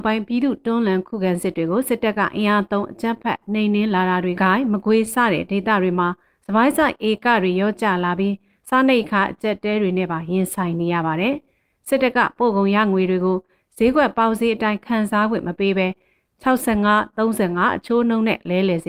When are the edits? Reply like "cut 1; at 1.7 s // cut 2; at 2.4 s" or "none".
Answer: cut 1; at 4.3 s